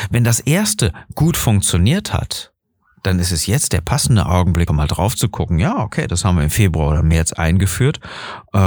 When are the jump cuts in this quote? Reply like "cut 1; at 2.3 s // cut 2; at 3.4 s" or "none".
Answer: cut 1; at 4.7 s